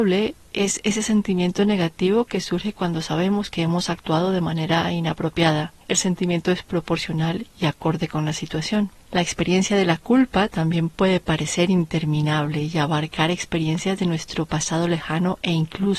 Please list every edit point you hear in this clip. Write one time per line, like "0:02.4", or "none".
0:05.8
0:09.0